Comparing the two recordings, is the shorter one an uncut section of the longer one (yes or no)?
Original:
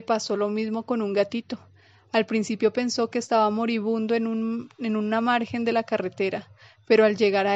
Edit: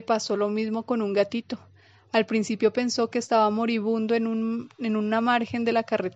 yes